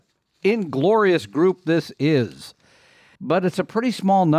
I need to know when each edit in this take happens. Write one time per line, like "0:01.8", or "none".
0:03.2